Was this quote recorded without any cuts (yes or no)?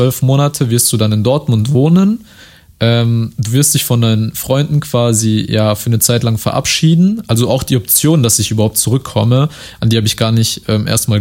yes